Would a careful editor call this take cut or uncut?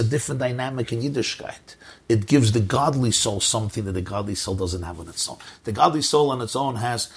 uncut